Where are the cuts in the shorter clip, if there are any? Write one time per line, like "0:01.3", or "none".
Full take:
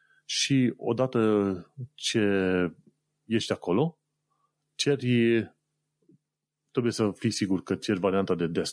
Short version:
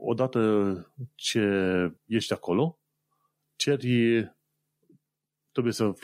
0:02.0